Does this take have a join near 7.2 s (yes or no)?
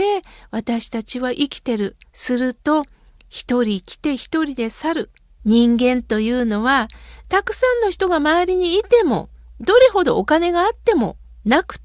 yes